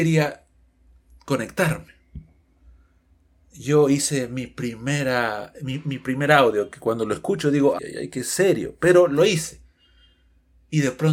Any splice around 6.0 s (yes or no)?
no